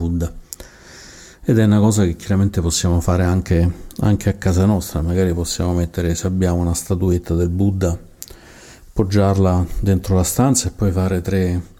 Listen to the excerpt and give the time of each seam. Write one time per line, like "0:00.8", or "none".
none